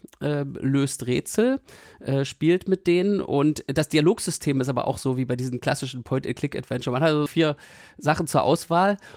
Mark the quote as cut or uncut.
cut